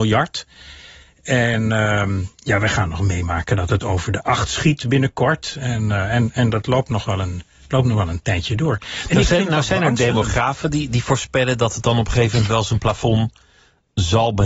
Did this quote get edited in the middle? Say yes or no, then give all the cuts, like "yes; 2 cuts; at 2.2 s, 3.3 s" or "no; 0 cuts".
no; 0 cuts